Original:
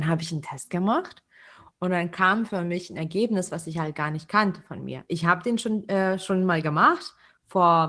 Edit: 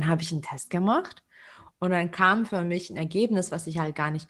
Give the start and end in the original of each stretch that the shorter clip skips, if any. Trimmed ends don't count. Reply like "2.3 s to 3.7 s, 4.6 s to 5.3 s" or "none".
none